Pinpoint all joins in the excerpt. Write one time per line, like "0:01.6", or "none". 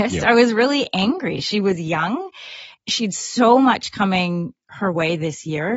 none